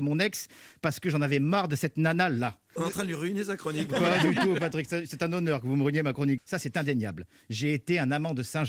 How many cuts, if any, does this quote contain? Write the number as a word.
two